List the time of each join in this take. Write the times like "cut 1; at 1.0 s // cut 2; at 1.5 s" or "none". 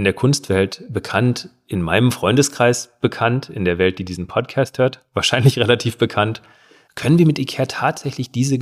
cut 1; at 6.8 s